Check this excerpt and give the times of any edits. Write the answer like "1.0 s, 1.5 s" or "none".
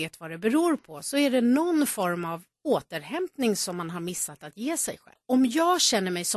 5.2 s